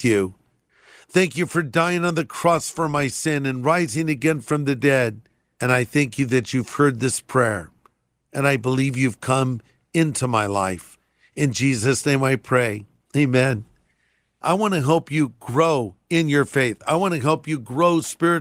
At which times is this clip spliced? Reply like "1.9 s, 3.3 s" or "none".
none